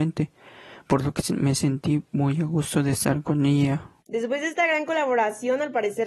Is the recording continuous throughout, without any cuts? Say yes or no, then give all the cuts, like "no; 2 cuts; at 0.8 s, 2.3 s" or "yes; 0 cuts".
no; 1 cut; at 4.0 s